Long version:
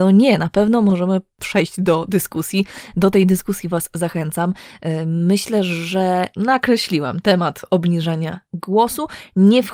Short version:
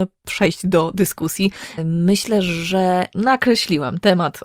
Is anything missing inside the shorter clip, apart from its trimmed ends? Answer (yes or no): yes